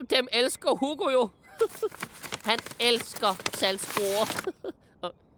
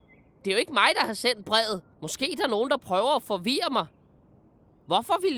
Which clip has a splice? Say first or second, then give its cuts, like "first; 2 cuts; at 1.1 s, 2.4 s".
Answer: second; 1 cut; at 2.0 s